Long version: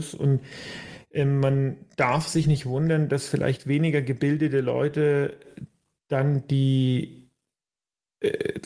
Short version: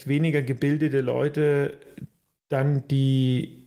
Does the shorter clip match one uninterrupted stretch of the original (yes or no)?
yes